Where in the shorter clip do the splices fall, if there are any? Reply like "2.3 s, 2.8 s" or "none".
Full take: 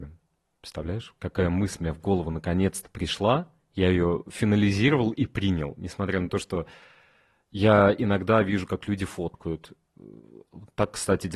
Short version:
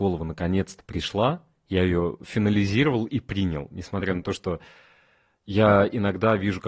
none